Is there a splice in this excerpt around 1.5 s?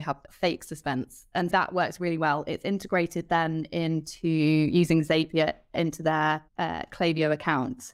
yes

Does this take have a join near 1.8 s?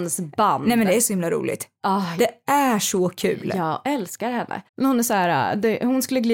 no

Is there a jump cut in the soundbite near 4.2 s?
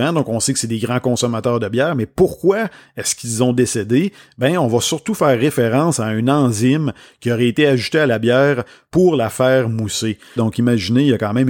no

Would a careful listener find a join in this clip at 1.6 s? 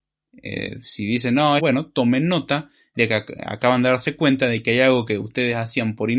yes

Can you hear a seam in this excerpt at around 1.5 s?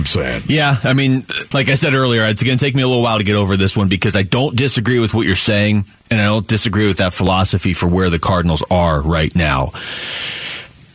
yes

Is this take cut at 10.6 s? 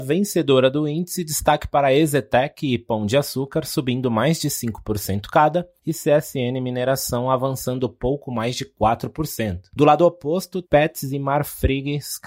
yes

